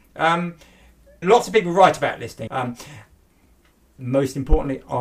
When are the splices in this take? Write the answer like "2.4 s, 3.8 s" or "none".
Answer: 1.2 s, 2.5 s